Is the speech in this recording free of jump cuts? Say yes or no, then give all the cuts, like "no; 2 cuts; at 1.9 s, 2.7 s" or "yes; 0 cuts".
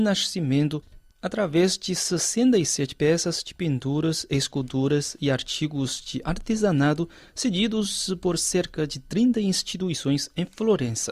yes; 0 cuts